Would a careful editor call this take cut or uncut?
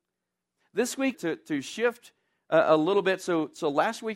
cut